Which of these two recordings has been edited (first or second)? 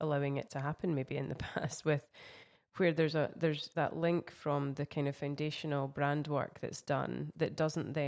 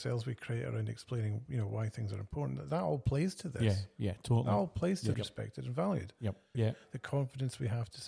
second